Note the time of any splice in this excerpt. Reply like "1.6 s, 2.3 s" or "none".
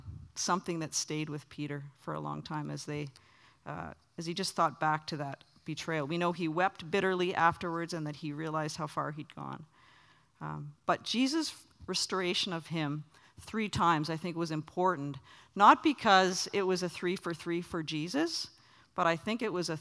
none